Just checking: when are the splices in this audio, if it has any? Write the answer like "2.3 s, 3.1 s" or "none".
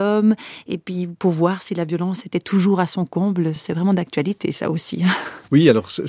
none